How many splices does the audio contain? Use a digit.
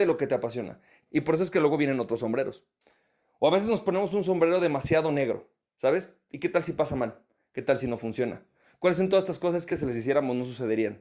2